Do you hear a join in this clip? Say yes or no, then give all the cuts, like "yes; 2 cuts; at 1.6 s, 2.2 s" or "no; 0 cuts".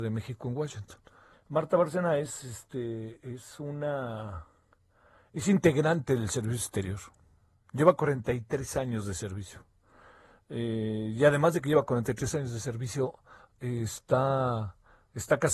yes; 1 cut; at 1.3 s